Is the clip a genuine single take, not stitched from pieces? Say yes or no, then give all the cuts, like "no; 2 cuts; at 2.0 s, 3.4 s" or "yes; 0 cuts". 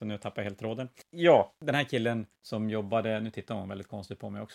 no; 1 cut; at 2.4 s